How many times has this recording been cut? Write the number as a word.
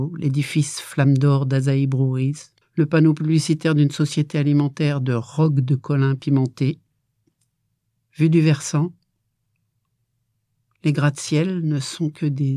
one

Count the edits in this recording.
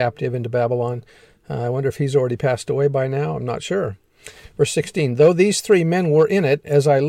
zero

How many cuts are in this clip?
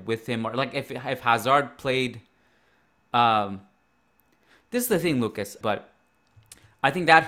one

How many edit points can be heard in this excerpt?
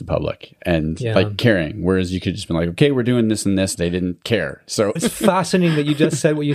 two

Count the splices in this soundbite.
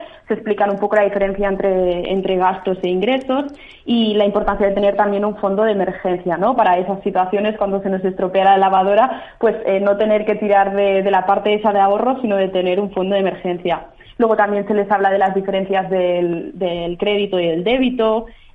zero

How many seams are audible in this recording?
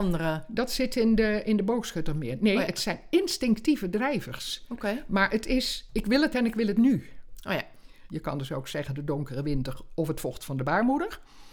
one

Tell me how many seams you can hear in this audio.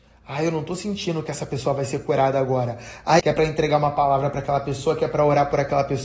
one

